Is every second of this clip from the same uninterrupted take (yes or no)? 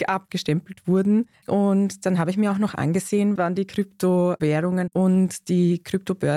no